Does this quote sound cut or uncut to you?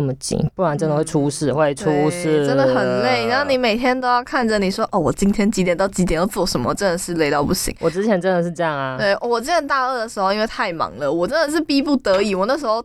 uncut